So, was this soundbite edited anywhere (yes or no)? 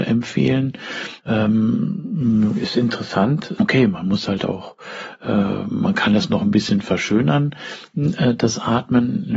yes